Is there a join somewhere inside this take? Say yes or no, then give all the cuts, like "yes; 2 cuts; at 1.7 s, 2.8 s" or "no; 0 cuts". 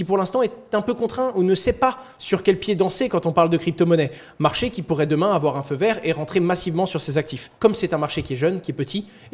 yes; 1 cut; at 7.6 s